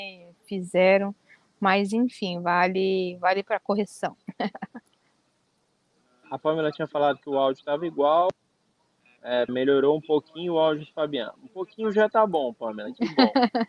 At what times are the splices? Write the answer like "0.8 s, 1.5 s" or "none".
6.2 s, 9.5 s